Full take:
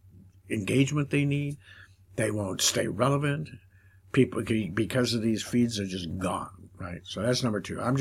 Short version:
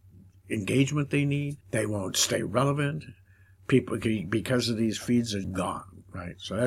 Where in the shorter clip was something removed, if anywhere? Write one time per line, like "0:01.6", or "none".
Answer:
0:01.6
0:05.4